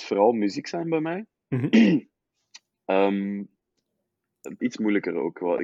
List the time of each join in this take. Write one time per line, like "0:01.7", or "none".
0:04.6

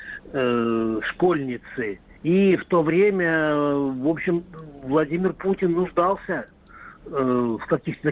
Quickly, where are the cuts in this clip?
0:02.2

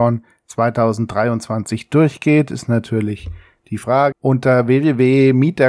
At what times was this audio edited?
0:04.1

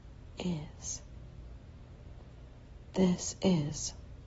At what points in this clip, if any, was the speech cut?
none

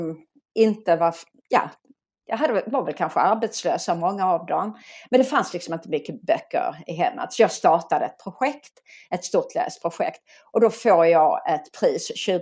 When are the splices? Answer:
none

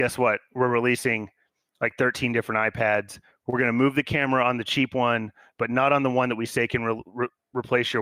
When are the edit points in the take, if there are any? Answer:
none

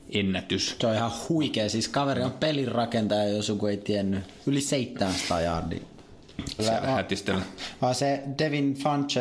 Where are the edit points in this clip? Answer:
0:06.6

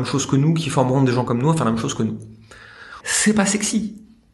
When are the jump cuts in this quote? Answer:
0:03.0

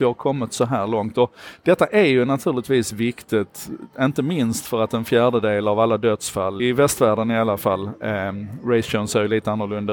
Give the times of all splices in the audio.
0:06.6

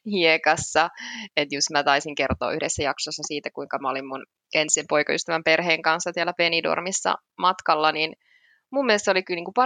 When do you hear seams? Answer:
none

